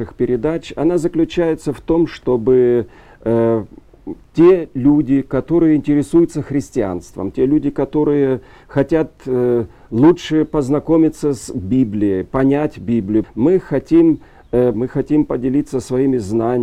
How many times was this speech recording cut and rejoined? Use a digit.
2